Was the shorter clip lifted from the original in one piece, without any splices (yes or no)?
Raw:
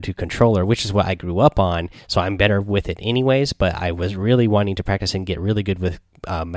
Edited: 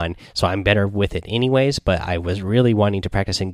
yes